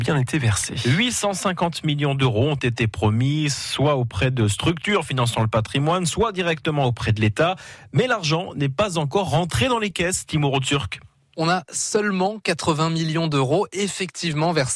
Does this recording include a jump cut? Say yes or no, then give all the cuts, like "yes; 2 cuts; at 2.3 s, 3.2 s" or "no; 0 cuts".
no; 0 cuts